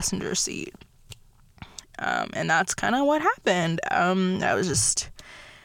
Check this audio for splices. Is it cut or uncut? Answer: cut